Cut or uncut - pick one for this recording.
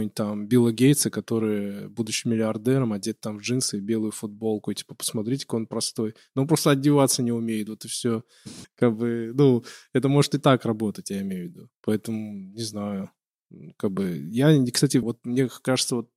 cut